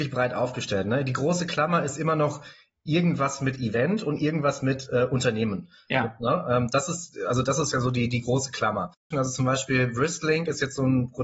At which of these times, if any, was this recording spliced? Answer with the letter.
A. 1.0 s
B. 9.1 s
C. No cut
B